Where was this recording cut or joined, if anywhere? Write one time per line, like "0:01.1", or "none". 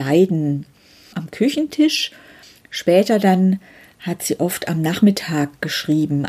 0:01.1